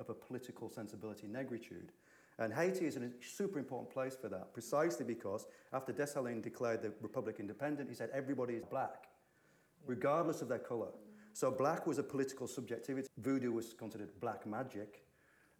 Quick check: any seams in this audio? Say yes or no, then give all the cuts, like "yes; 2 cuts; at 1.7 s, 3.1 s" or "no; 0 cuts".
yes; 2 cuts; at 8.6 s, 13.1 s